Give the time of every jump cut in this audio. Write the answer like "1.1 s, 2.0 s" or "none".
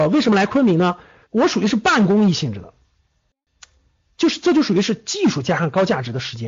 1.2 s